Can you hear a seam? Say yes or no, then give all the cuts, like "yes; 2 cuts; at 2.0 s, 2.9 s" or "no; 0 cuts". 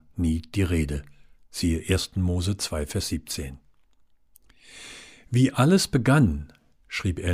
no; 0 cuts